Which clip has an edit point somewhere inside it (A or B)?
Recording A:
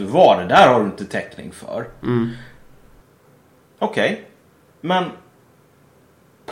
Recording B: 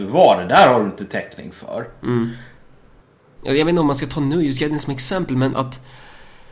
B